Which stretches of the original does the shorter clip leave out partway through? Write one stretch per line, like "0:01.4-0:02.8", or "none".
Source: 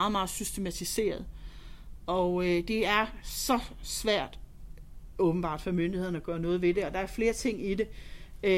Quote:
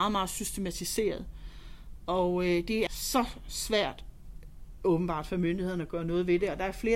0:02.9-0:03.2